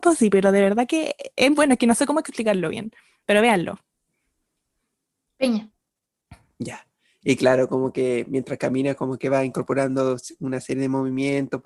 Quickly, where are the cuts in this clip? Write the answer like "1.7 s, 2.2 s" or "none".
1.5 s, 7.2 s